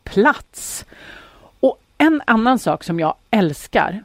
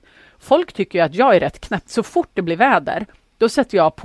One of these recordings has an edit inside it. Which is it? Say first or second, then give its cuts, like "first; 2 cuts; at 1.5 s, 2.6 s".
second; 1 cut; at 1.9 s